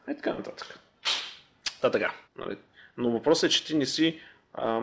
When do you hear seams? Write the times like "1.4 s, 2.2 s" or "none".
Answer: 2.2 s